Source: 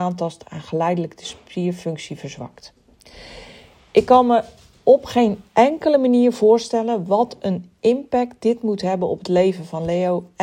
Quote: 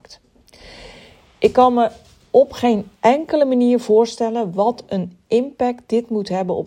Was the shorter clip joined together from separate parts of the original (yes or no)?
no